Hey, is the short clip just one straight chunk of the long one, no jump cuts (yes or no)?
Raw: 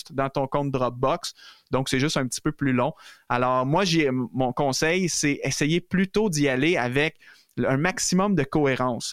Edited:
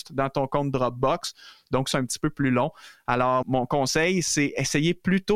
no